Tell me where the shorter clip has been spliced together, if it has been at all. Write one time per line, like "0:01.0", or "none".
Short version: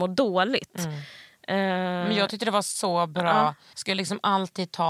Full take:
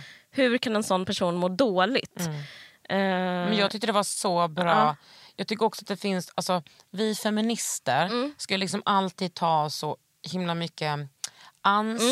0:03.7